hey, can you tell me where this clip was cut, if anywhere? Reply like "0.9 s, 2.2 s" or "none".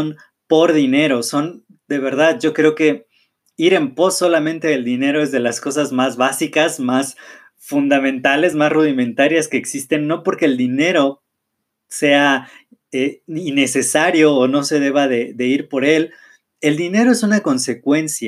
none